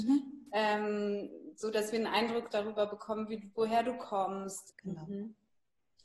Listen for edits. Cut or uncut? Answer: cut